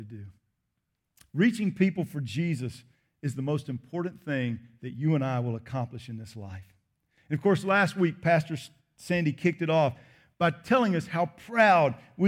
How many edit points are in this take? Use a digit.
1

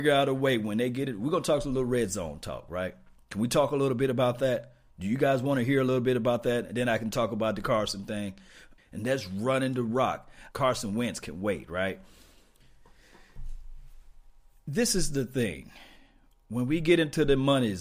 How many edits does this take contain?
2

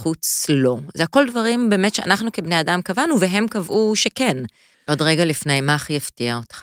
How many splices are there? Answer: 1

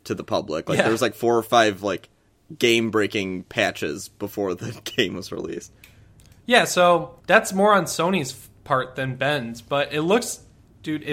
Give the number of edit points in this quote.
1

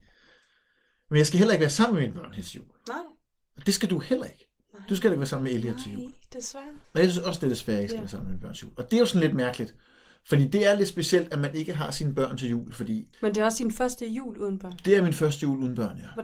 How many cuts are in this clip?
2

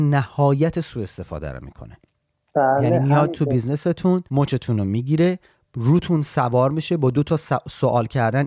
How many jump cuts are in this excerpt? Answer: 1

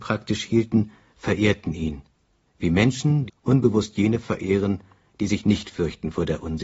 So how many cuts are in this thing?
1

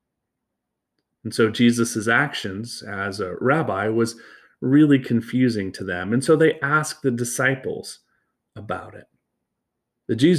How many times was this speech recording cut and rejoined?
0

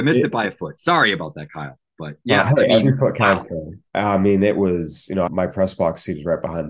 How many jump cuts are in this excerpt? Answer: 2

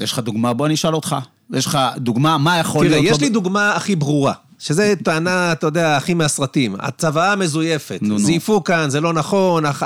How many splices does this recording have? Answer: 0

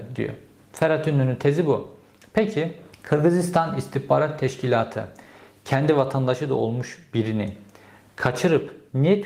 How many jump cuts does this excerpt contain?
1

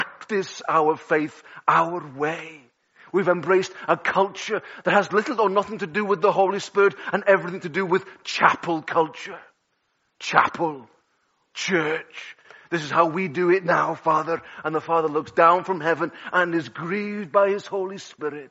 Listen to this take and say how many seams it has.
0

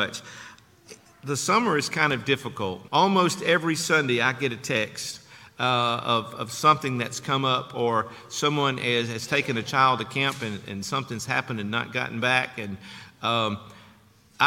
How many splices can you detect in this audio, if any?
1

